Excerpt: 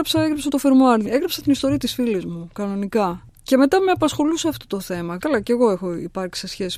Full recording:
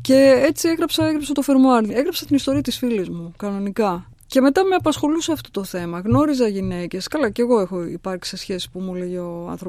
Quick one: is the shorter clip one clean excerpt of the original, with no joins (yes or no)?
no